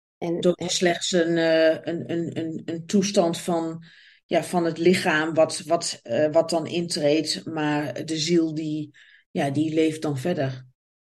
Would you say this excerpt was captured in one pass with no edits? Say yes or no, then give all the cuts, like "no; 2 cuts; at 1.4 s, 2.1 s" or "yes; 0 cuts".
yes; 0 cuts